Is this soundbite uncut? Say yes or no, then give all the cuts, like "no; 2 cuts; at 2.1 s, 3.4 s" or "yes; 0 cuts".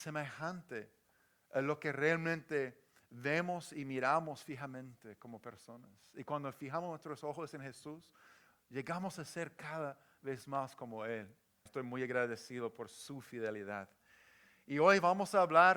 no; 1 cut; at 11.7 s